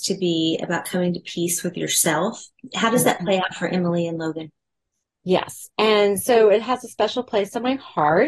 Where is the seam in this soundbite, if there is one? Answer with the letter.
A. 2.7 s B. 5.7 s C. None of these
B